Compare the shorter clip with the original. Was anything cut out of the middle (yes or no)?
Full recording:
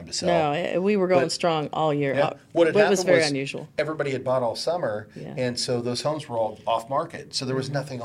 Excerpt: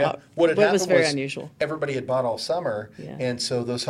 no